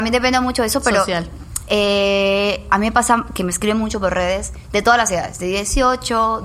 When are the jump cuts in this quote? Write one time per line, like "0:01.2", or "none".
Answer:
none